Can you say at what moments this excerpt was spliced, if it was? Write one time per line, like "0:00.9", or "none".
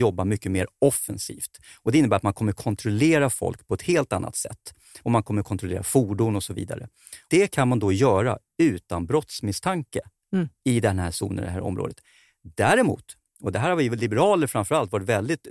none